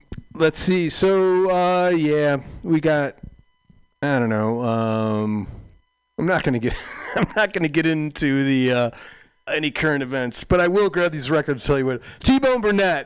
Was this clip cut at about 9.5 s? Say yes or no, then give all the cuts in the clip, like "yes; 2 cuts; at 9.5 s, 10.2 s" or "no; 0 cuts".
yes; 1 cut; at 9.5 s